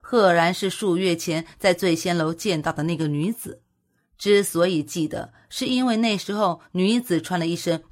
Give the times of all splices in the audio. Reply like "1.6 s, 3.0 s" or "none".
none